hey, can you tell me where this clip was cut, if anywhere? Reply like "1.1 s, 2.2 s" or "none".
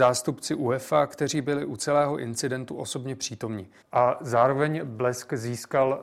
3.8 s